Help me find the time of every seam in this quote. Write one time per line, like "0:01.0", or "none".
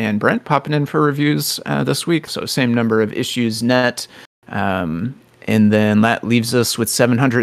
0:02.3